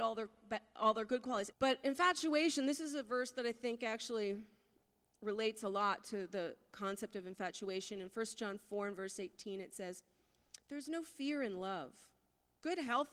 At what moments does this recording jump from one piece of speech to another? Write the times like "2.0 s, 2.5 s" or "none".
1.5 s